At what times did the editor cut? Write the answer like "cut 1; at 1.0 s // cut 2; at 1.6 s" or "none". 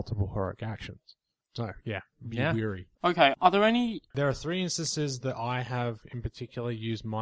cut 1; at 2.9 s // cut 2; at 4.1 s